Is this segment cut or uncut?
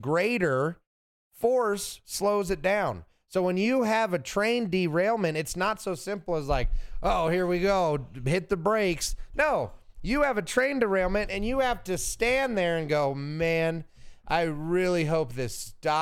uncut